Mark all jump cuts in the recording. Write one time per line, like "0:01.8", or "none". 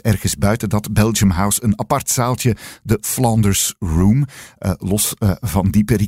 none